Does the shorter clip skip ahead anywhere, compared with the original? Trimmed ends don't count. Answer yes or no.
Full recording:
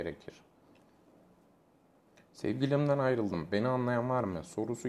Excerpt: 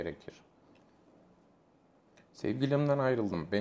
no